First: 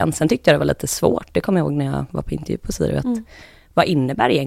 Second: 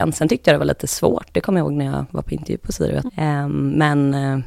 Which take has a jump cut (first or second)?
second